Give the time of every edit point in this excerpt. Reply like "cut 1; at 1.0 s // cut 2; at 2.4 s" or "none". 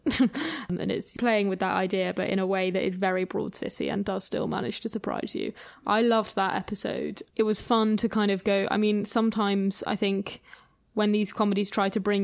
none